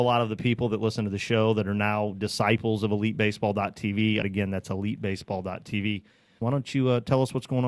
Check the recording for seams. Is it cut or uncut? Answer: cut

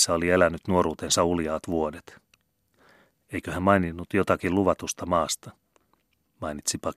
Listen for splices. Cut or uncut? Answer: uncut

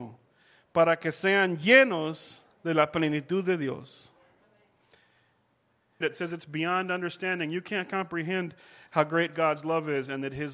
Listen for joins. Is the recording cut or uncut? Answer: cut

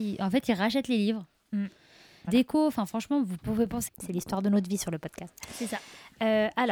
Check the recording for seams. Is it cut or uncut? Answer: cut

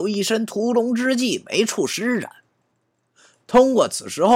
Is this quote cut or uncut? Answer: uncut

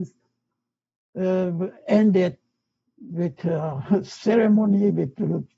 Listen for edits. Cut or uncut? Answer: cut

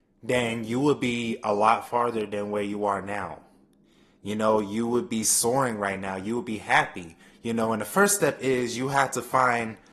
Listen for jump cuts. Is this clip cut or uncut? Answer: uncut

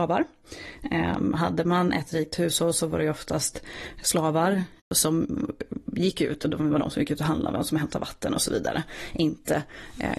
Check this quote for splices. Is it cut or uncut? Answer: uncut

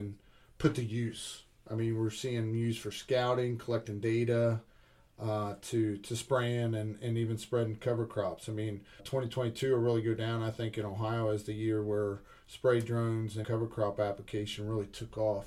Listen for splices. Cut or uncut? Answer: cut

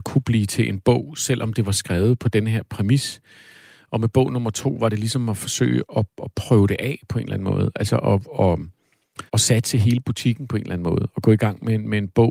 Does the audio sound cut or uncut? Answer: cut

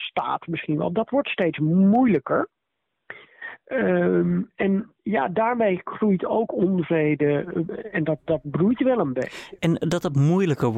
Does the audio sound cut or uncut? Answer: uncut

